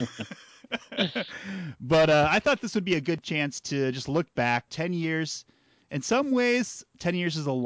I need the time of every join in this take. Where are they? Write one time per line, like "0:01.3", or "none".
0:04.7